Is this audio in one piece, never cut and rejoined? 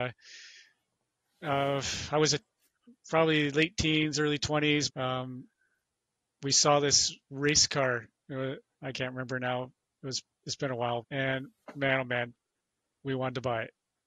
no; 3 cuts; at 4.9 s, 8.8 s, 11.0 s

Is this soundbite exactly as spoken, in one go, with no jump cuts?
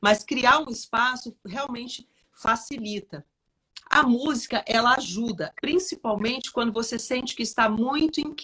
no; 2 cuts; at 3.8 s, 5.5 s

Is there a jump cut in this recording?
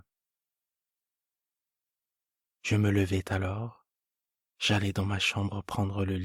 no; 0 cuts

